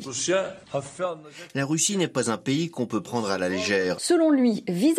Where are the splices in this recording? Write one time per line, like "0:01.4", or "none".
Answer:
0:03.9